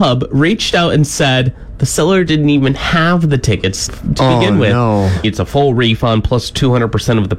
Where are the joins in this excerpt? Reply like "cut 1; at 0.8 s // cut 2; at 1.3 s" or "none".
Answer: cut 1; at 3.9 s // cut 2; at 5.2 s